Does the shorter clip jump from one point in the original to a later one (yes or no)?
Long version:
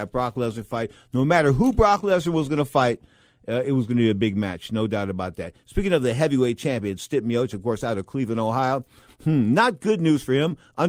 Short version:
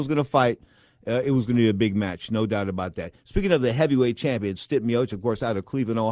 no